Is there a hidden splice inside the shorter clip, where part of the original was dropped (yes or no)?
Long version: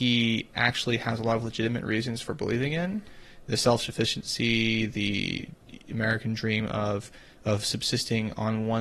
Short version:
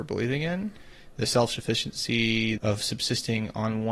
yes